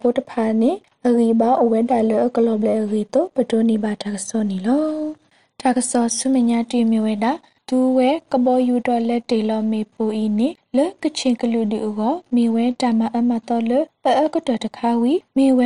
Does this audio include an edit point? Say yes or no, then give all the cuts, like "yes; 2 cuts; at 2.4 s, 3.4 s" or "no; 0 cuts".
no; 0 cuts